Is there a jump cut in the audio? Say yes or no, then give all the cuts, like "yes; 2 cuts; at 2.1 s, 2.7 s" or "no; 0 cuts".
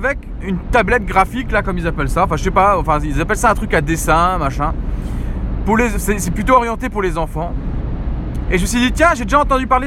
no; 0 cuts